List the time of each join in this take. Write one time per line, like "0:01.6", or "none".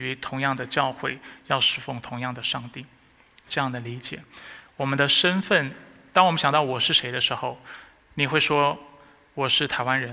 none